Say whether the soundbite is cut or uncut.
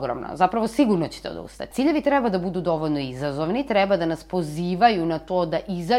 cut